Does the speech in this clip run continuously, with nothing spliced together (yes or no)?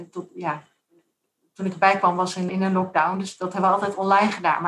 no